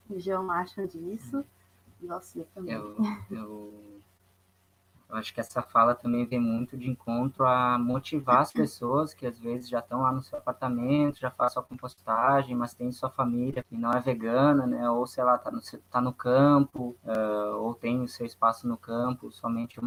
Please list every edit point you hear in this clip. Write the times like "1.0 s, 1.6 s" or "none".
13.6 s, 17.0 s

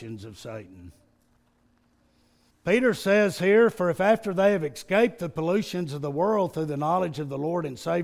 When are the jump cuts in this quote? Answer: 2.5 s

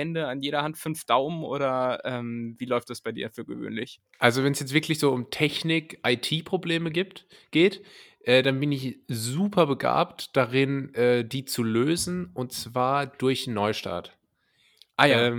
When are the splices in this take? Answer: none

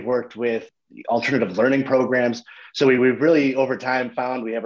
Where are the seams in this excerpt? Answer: none

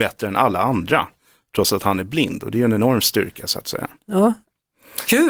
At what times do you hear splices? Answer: none

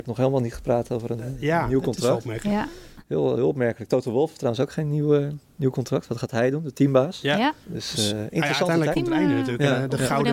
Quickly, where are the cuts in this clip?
7.6 s, 8.9 s

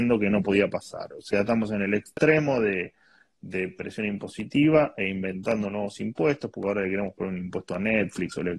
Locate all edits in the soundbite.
none

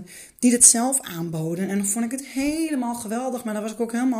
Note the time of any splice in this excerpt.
none

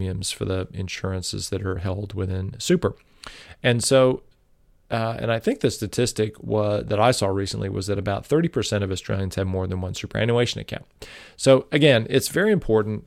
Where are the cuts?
none

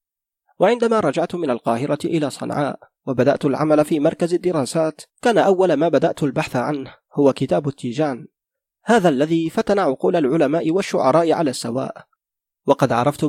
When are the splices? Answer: none

